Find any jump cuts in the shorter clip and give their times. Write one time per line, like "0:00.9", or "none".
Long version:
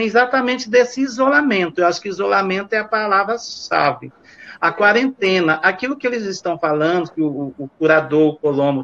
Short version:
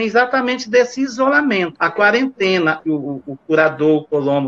0:01.8
0:02.8